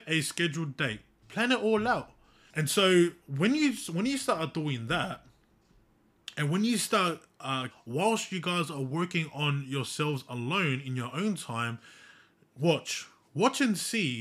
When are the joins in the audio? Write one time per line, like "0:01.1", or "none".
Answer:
0:02.5
0:07.7